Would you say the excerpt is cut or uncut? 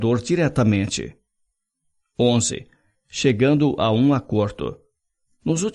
uncut